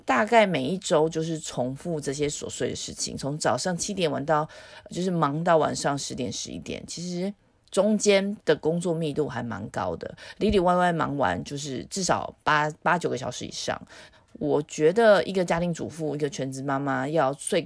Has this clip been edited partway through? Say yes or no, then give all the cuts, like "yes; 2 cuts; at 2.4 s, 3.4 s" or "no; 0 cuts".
yes; 1 cut; at 14.1 s